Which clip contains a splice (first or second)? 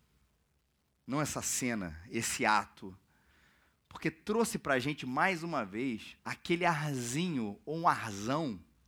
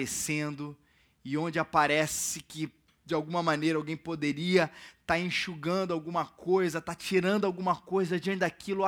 first